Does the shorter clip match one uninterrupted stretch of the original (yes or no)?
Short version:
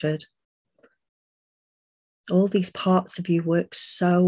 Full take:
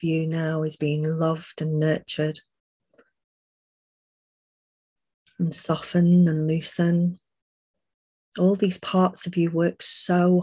no